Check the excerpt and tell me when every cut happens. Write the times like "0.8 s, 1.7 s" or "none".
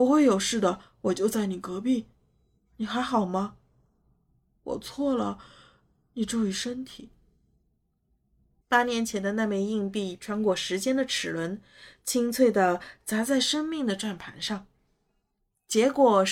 8.6 s